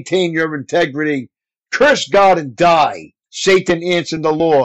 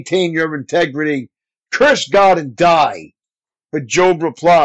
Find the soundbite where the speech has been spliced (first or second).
first